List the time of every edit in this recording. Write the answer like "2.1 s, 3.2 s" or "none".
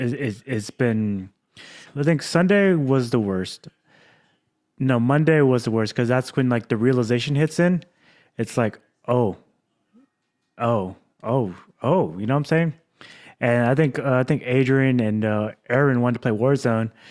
1.9 s